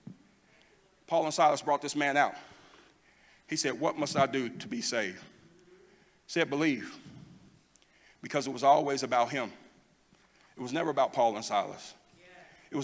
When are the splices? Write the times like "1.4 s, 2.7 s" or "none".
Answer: none